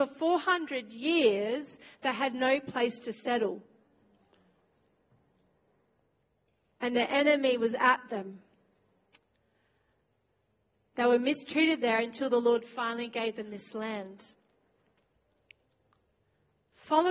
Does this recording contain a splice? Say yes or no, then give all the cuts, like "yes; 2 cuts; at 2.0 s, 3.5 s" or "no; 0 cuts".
no; 0 cuts